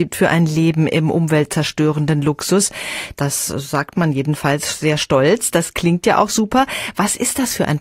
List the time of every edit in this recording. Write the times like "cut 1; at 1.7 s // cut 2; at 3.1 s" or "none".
cut 1; at 3.1 s